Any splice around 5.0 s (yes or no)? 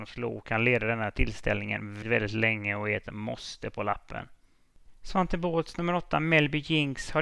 no